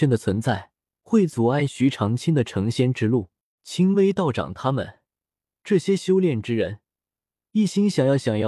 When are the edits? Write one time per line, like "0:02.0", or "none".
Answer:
0:03.6